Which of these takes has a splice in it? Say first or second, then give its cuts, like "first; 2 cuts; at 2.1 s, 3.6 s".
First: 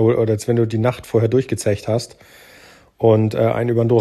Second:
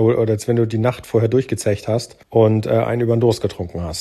second; 1 cut; at 2.2 s